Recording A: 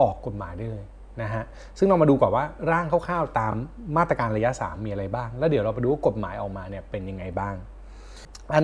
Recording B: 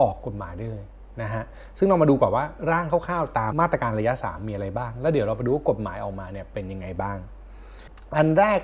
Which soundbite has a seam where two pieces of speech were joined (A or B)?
B